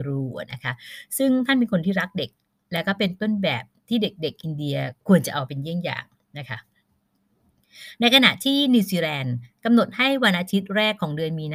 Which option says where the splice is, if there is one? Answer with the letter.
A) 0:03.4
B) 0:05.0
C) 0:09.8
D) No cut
B